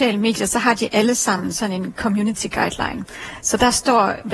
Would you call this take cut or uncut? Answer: uncut